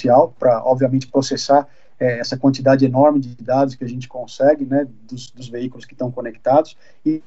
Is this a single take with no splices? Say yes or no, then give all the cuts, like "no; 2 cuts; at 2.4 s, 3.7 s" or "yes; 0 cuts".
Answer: yes; 0 cuts